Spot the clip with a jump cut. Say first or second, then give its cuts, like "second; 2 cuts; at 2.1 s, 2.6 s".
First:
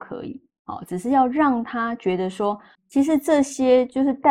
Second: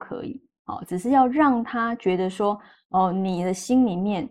first; 1 cut; at 2.8 s